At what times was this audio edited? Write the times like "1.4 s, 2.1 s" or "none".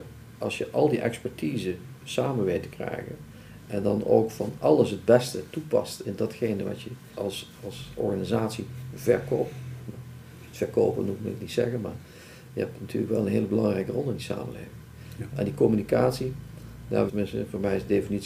7.1 s, 15.3 s, 17.1 s